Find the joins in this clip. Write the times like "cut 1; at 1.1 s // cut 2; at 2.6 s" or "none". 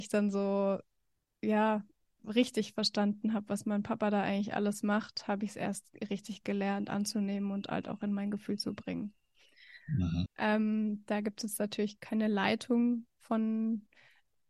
cut 1; at 10.3 s // cut 2; at 12.0 s